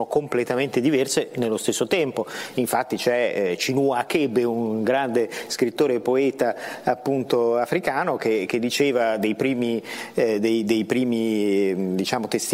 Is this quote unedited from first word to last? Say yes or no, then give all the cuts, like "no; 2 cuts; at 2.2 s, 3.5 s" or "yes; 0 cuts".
yes; 0 cuts